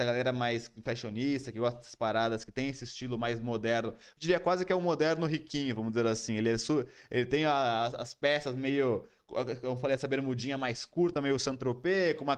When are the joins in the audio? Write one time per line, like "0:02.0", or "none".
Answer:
none